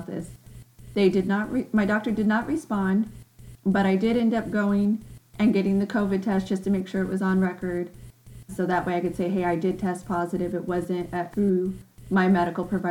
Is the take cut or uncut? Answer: cut